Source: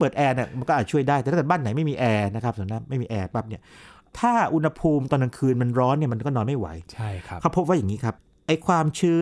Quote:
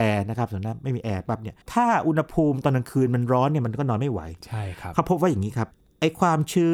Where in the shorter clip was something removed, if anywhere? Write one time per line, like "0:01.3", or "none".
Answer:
0:01.6